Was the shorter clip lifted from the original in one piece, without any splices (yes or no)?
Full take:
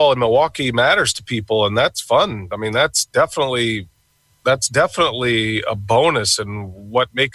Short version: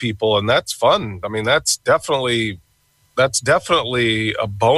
yes